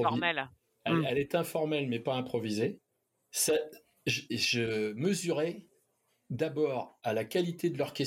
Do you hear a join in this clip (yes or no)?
yes